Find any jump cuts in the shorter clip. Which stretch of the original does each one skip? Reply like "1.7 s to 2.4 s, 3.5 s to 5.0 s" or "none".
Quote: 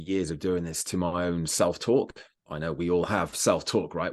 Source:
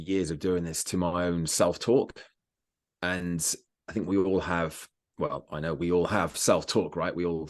2.5 s to 5.5 s